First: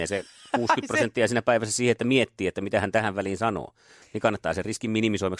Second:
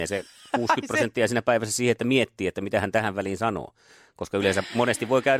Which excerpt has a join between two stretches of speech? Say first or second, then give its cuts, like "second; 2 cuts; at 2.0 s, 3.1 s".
first; 1 cut; at 4.0 s